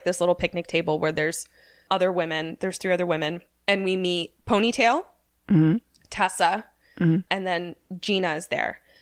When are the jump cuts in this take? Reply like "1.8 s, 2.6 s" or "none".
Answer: none